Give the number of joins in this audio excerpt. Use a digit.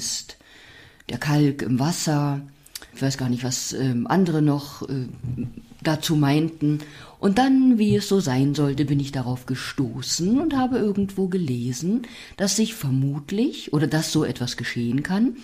1